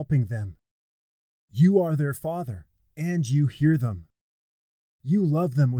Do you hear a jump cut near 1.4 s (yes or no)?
no